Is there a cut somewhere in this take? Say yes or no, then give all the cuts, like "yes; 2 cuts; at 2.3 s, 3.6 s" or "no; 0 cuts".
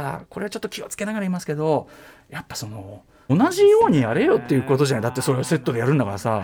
yes; 1 cut; at 3.3 s